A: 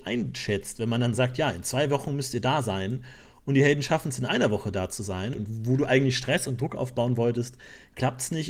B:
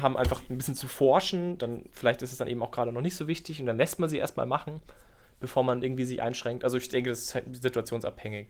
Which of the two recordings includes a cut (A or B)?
A